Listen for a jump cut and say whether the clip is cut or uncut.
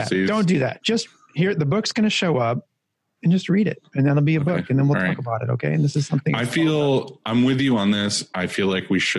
uncut